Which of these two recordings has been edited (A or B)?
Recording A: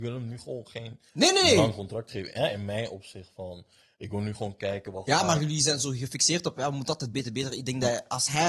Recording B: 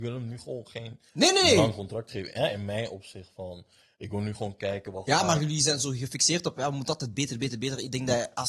A